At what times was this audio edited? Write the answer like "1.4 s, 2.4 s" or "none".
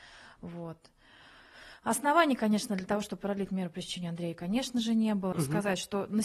5.3 s